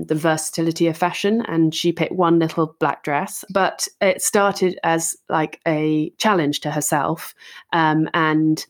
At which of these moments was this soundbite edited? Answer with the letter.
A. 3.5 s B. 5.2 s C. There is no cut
A